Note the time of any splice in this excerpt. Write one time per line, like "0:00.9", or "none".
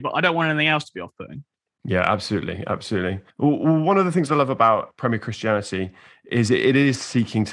0:03.3
0:04.9